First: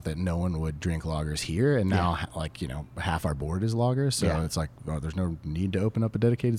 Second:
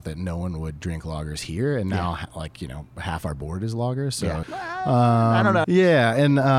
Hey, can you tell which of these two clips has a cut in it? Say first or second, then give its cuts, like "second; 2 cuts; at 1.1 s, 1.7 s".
second; 2 cuts; at 4.4 s, 5.6 s